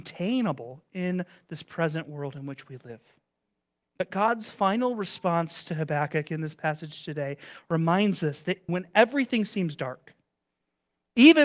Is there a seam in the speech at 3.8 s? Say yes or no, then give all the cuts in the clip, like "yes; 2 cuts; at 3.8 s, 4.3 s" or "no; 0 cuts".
yes; 2 cuts; at 3.8 s, 8.7 s